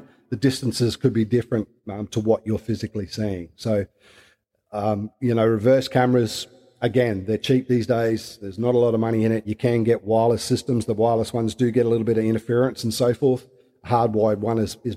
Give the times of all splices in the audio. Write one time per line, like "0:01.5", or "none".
none

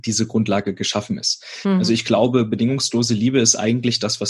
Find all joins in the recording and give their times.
none

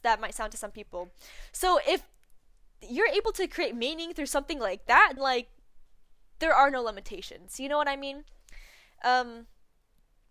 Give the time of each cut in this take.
0:05.2

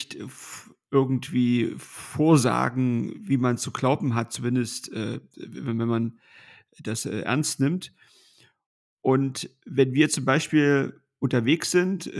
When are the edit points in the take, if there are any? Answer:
none

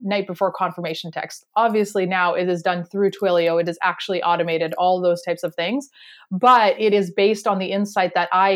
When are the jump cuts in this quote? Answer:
none

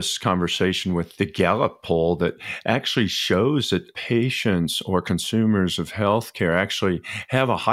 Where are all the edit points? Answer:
none

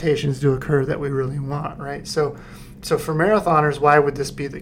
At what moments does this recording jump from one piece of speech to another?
0:02.8

